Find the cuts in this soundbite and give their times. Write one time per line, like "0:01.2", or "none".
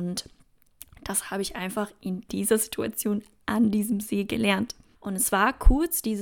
0:04.9

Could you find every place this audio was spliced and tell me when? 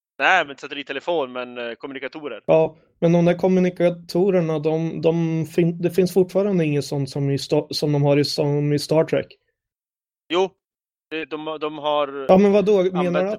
0:05.0

